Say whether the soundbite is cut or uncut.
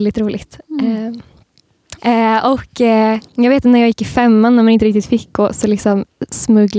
cut